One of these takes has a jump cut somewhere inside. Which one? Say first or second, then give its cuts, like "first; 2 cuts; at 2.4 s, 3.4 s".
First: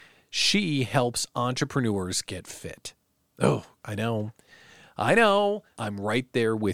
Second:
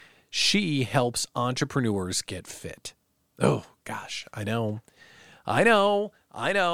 first; 2 cuts; at 3.8 s, 5.7 s